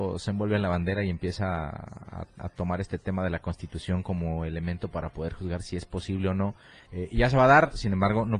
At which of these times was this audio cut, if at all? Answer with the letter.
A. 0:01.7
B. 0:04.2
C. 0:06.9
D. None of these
C